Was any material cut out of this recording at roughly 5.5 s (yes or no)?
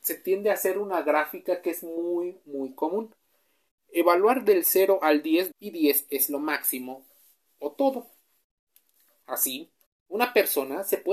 yes